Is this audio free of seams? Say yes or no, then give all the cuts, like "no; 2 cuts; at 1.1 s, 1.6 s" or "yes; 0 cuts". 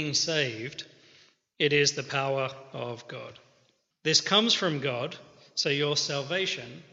no; 1 cut; at 3.9 s